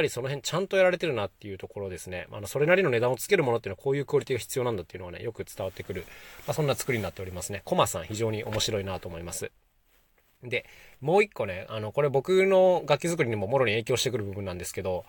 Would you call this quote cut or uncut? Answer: uncut